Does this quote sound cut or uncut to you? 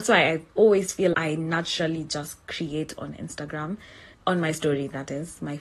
cut